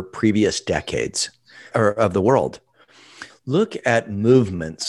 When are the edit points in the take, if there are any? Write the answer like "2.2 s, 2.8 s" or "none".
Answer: 1.7 s, 3.3 s